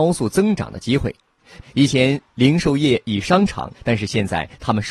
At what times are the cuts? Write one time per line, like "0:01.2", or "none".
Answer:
0:01.6
0:03.7